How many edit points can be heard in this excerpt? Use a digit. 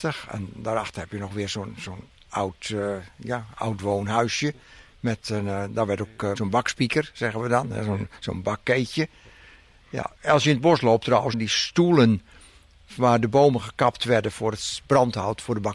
2